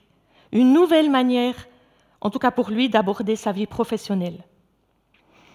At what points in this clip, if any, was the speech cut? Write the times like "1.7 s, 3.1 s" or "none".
none

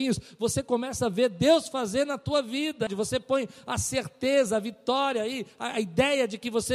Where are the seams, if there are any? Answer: 2.9 s

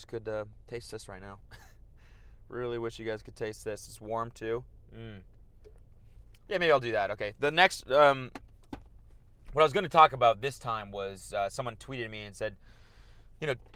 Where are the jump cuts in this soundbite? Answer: 6.5 s

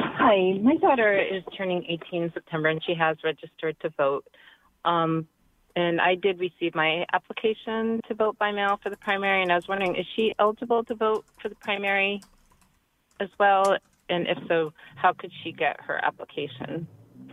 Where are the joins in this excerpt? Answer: none

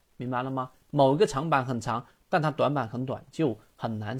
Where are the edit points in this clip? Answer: none

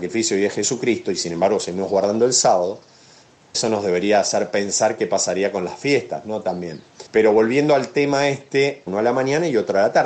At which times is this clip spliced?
7.1 s, 8.9 s

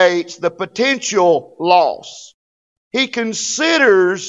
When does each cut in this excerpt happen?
none

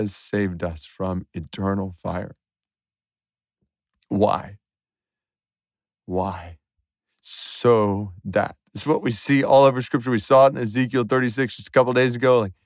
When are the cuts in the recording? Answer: none

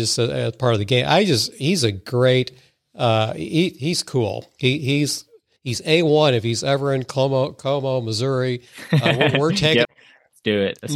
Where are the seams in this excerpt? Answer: 5.6 s, 9.8 s

